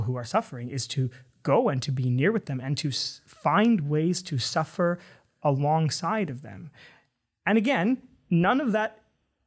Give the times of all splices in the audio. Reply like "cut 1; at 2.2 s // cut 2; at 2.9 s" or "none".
none